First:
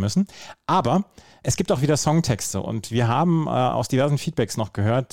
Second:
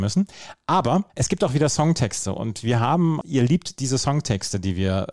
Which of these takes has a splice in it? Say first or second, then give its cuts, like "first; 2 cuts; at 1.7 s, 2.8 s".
second; 2 cuts; at 1.1 s, 3.2 s